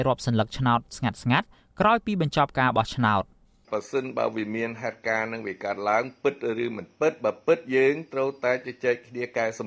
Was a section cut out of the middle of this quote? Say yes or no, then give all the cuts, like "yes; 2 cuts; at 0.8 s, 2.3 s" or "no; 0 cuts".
no; 0 cuts